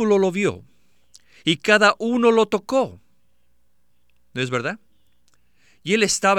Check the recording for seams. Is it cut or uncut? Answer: uncut